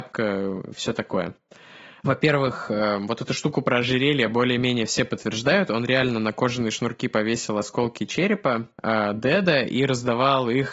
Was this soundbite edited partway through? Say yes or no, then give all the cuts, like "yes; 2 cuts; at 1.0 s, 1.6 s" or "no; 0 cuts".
yes; 1 cut; at 2.0 s